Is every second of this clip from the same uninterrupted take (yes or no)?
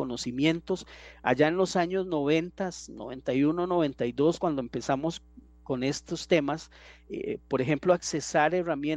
yes